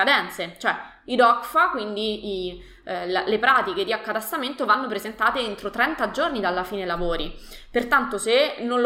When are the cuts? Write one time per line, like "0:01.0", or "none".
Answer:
none